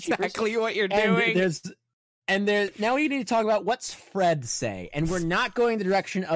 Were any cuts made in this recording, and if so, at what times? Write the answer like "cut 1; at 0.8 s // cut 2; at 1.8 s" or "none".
none